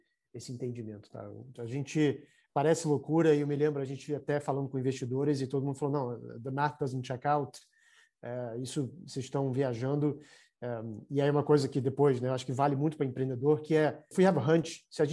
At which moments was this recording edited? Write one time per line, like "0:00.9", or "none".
0:01.6